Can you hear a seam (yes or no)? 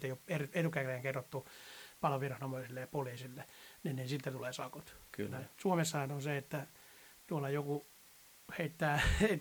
no